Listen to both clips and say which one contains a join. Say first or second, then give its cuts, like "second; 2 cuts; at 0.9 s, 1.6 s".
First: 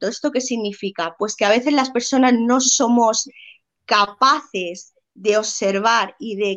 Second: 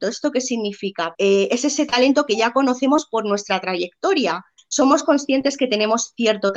second; 2 cuts; at 1.1 s, 4.6 s